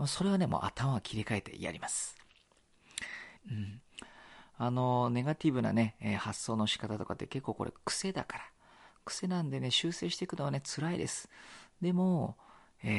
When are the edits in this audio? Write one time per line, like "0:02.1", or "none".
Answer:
0:03.4